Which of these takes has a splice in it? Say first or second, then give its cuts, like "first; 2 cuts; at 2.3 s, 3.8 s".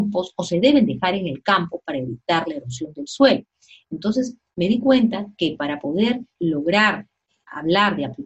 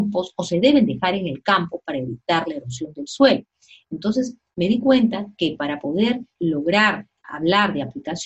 second; 1 cut; at 7.2 s